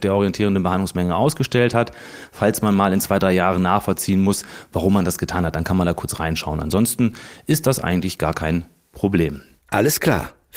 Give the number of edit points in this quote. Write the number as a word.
zero